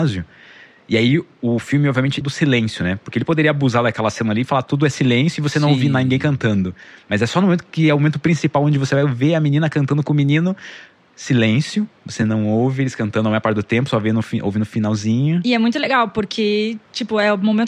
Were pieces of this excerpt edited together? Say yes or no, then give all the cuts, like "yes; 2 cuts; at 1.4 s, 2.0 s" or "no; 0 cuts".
yes; 1 cut; at 2.2 s